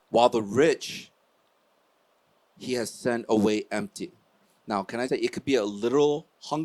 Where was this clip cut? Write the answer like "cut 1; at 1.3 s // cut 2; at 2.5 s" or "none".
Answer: cut 1; at 5.1 s